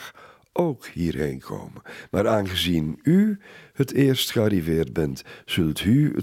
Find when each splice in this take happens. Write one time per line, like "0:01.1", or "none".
none